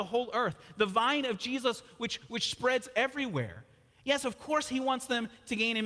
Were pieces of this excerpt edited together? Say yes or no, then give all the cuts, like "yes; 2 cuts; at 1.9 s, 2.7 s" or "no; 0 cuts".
no; 0 cuts